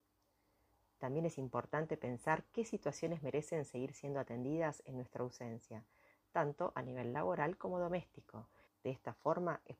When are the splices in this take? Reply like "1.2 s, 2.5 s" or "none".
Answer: 8.7 s